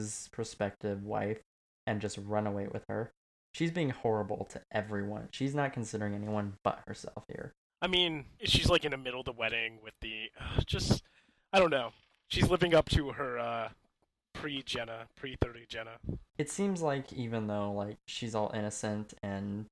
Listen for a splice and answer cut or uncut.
cut